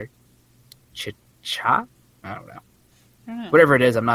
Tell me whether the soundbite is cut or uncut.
cut